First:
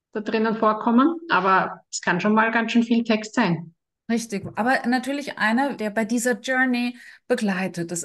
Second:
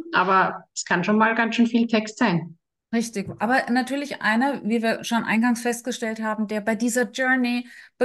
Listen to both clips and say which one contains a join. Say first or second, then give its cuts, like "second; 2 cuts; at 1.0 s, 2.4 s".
first; 1 cut; at 5.8 s